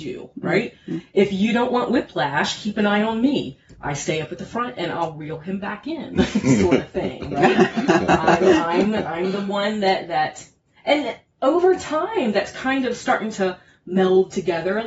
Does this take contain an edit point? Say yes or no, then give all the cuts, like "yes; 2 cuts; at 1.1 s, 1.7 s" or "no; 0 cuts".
no; 0 cuts